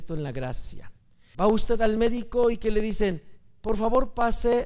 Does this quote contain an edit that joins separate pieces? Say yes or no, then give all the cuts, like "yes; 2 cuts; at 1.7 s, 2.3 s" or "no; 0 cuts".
yes; 1 cut; at 1.3 s